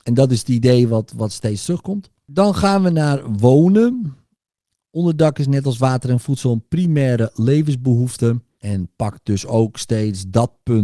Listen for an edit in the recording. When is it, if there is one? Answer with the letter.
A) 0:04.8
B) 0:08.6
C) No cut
B